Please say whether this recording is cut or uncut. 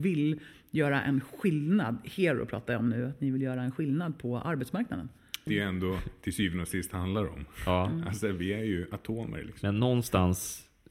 cut